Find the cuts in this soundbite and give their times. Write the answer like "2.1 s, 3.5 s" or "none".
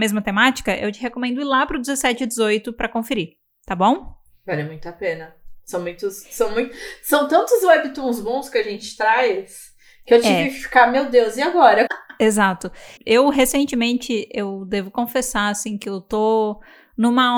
11.9 s, 13.0 s